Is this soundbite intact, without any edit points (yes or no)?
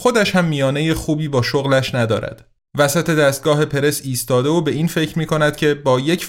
no